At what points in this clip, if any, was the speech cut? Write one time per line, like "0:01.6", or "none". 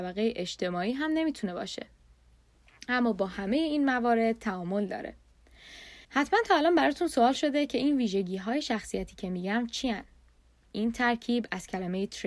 0:06.0